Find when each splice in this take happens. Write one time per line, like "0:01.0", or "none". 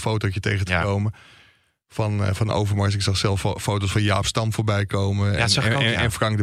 none